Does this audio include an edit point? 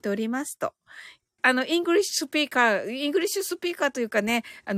yes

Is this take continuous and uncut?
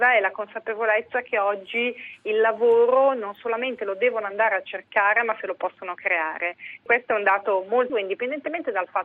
no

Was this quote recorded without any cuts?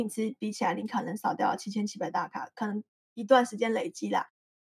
yes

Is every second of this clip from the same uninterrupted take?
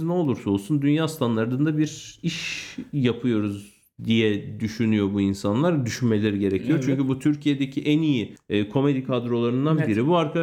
yes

